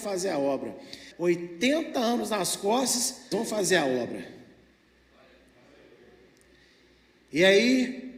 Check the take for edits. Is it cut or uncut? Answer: cut